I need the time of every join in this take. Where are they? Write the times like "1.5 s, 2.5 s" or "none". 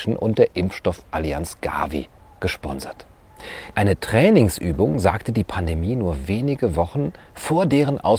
3.7 s